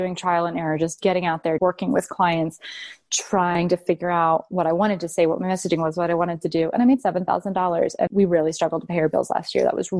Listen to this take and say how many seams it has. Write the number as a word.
two